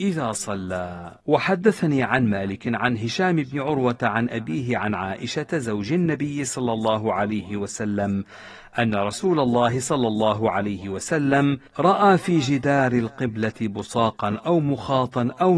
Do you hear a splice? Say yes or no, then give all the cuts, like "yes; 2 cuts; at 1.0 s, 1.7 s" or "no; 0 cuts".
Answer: yes; 2 cuts; at 1.2 s, 11.7 s